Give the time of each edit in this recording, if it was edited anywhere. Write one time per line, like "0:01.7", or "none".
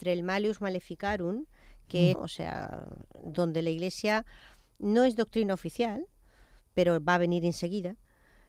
0:02.1